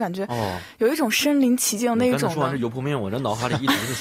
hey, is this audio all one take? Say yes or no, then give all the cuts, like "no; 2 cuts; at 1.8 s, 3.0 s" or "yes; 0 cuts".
yes; 0 cuts